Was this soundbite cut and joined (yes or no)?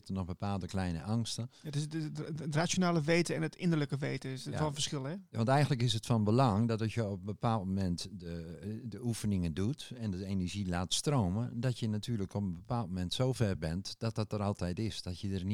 no